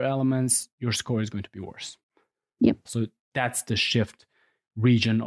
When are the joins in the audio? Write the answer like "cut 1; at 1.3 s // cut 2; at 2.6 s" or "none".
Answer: cut 1; at 2.9 s